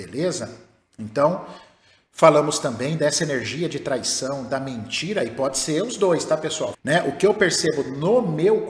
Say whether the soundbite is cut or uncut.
cut